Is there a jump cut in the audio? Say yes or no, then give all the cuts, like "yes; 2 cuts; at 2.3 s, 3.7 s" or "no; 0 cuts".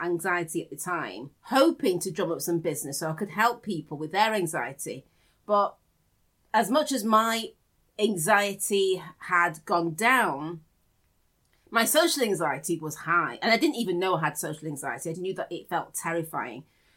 yes; 2 cuts; at 1.4 s, 15.1 s